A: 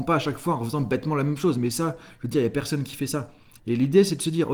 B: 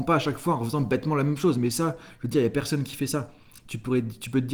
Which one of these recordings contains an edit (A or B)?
A